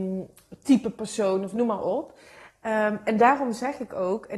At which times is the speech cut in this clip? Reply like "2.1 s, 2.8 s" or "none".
none

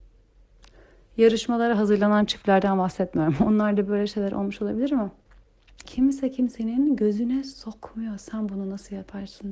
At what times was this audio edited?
5.8 s

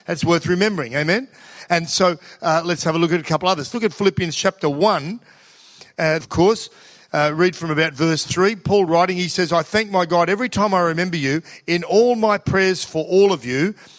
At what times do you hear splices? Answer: 6.2 s

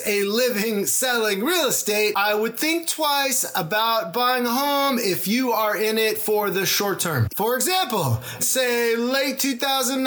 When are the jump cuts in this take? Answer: 7.3 s, 8.4 s

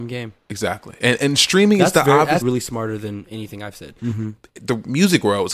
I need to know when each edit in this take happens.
2.4 s, 4.0 s

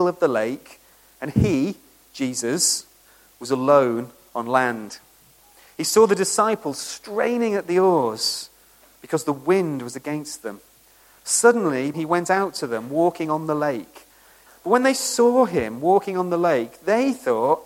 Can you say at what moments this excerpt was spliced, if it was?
11.9 s, 14.5 s

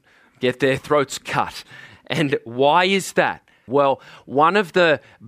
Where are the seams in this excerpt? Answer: 3.7 s

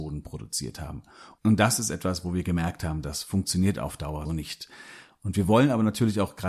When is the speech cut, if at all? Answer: 4.2 s

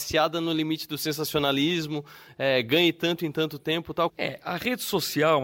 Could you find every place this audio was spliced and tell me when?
4.1 s

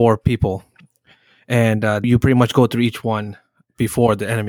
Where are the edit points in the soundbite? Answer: 2.0 s

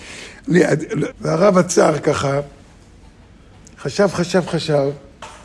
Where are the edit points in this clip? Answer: 1.1 s

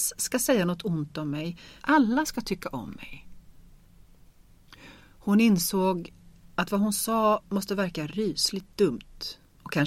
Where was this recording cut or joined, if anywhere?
1.8 s

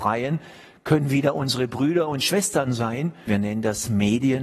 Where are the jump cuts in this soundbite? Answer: 3.3 s

